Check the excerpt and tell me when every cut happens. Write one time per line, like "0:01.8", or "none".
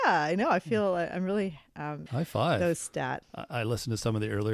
0:02.1
0:03.2